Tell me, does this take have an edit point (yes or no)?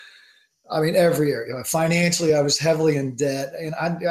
no